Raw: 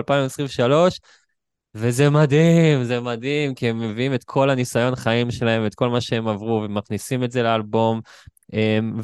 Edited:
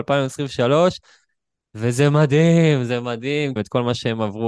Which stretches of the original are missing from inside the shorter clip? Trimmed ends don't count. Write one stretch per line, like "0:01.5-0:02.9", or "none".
0:03.6-0:05.6